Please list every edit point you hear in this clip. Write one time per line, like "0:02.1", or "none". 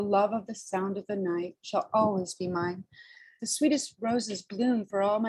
0:03.4